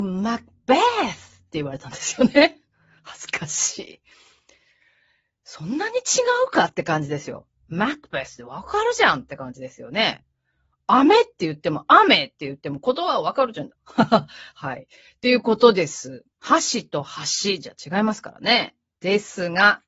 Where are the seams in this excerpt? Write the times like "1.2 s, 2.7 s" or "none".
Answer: 13.7 s, 16.3 s, 18.9 s